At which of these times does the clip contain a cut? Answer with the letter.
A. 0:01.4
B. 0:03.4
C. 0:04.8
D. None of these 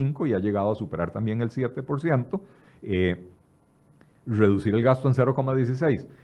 D